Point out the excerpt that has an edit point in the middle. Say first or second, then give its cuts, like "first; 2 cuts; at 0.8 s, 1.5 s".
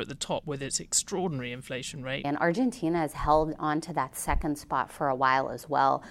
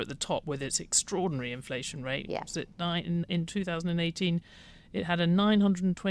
first; 1 cut; at 2.2 s